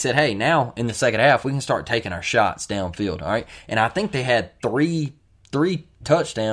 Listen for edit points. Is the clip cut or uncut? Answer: uncut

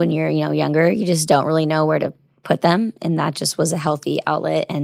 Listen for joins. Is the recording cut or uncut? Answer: uncut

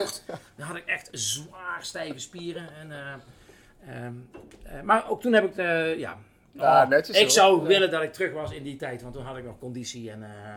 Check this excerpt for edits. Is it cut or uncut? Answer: uncut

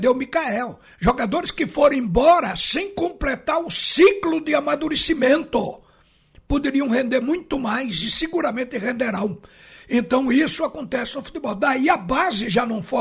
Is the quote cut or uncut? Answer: uncut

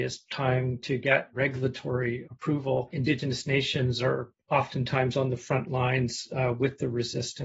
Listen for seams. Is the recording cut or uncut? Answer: uncut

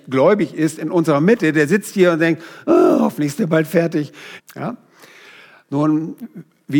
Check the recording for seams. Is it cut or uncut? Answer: cut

